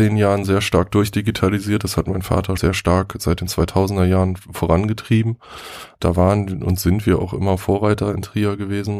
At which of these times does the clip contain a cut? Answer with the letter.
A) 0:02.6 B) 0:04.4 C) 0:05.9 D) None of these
A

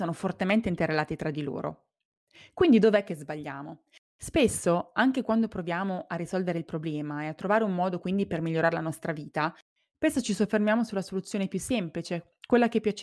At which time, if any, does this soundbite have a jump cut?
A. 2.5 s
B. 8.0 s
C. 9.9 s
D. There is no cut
D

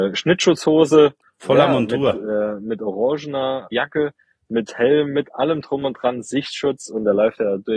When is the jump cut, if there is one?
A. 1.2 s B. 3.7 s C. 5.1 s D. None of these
B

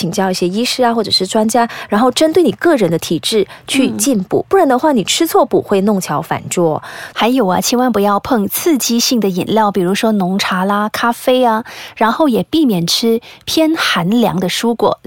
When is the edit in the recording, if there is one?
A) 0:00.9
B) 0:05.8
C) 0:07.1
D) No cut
C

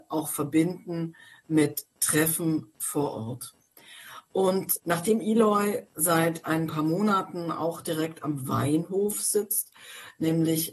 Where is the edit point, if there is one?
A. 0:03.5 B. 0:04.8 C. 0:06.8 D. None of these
B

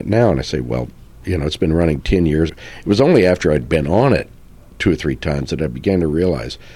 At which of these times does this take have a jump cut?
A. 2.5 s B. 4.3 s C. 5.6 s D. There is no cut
A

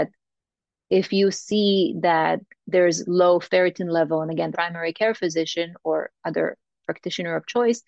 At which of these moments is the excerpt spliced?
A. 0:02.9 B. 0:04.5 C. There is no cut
B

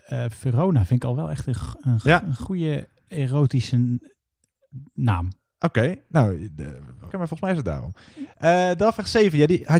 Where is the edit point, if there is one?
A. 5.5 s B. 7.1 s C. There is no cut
B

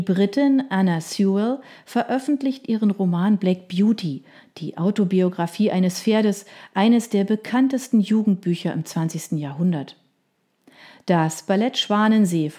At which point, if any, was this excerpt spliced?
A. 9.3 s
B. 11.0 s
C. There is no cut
C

